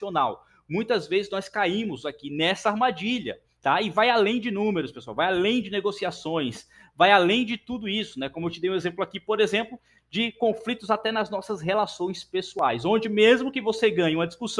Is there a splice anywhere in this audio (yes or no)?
no